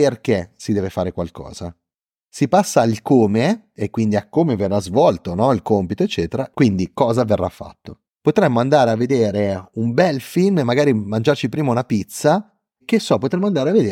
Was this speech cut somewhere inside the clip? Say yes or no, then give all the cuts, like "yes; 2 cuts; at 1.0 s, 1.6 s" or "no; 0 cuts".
yes; 1 cut; at 8.1 s